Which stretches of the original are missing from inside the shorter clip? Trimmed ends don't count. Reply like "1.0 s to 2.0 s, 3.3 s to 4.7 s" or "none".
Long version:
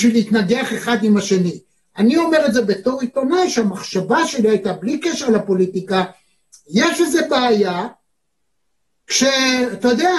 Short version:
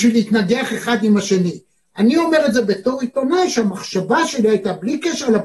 none